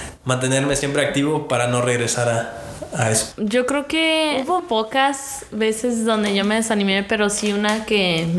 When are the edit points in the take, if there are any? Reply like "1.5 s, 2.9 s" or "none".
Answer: 3.3 s, 4.6 s

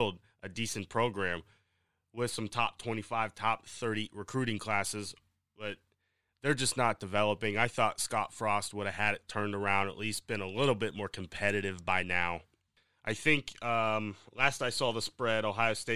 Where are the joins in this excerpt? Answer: none

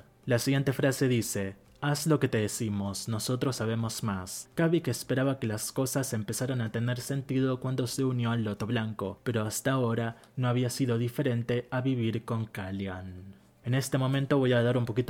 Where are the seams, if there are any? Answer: 13.6 s

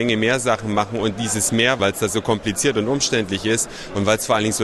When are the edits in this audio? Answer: 1.8 s

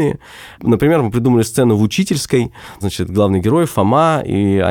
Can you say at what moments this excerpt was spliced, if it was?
2.8 s

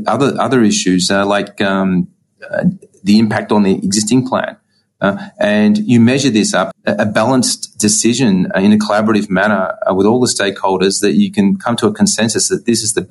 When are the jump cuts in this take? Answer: 6.7 s

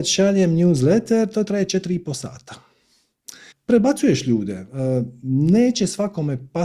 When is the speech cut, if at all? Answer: 3.5 s

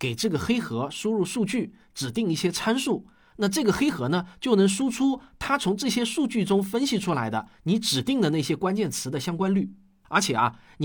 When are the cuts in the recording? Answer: none

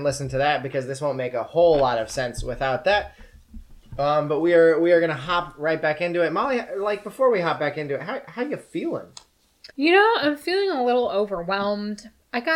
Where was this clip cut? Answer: 9.7 s

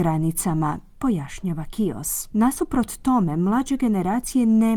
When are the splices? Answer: 2.3 s

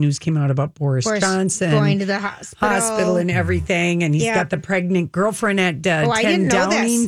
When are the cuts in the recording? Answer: none

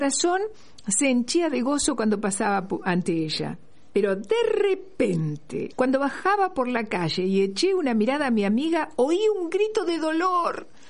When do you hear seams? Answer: 5.7 s

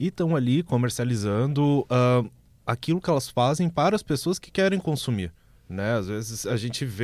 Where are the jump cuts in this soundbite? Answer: none

